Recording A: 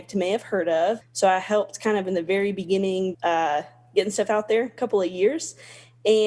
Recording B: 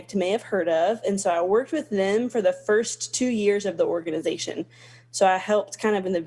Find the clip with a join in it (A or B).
A